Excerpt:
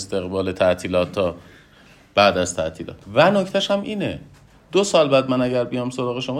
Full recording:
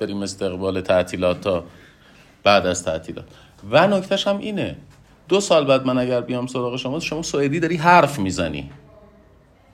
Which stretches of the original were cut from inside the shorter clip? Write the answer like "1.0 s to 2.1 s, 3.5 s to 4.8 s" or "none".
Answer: 3.3 s to 3.6 s